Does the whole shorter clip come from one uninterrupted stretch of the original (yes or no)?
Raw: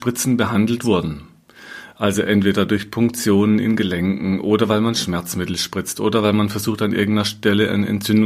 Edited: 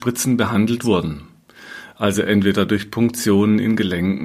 yes